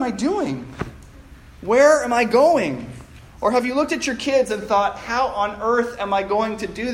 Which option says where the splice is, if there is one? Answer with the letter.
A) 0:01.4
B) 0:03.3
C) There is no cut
C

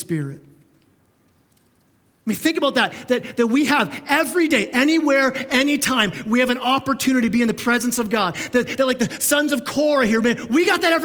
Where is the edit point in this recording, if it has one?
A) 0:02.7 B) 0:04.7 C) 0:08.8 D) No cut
D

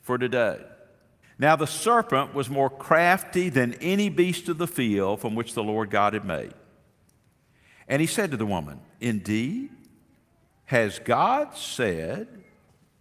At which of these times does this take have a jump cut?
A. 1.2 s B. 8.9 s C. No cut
A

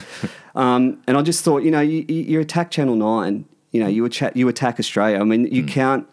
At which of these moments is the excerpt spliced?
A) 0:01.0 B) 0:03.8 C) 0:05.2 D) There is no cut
D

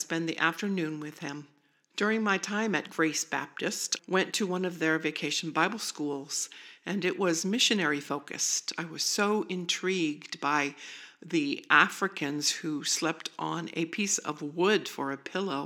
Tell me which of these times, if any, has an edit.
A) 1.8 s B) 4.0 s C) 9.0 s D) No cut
B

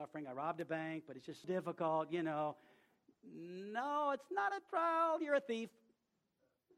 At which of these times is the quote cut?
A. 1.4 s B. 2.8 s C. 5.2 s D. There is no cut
A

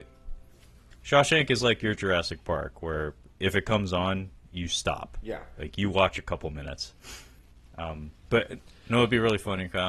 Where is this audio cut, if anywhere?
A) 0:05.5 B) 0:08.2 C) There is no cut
B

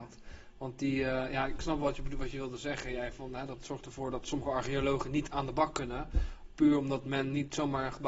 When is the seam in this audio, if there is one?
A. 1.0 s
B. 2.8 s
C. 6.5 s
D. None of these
D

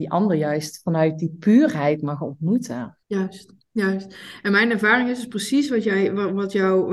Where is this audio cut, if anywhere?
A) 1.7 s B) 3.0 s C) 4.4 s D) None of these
B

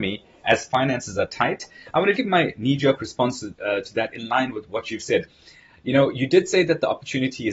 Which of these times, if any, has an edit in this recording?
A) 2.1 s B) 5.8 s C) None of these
A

